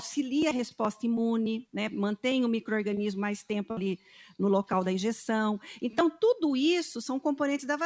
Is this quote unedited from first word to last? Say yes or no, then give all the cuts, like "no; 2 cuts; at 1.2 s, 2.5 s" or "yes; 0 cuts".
yes; 0 cuts